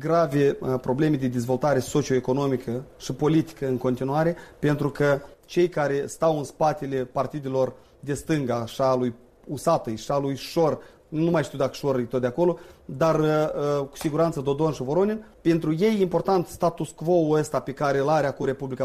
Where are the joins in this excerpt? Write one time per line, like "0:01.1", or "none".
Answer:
none